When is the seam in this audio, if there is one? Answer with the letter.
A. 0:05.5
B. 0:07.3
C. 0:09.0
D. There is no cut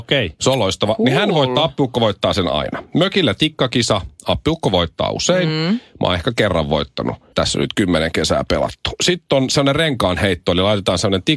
B